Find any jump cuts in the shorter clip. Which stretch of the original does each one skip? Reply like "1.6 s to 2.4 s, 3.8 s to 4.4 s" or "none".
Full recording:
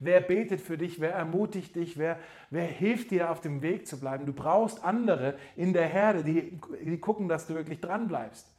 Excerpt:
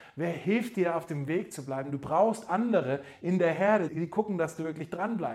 6.2 s to 6.8 s